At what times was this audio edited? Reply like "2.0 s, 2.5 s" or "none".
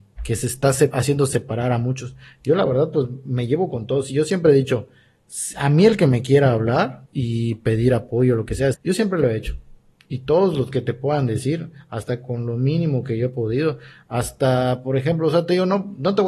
7.1 s, 8.7 s